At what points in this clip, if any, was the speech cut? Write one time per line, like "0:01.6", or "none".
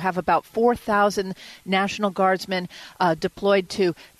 none